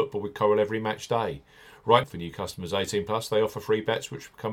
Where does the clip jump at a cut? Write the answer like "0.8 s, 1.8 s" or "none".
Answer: 2.0 s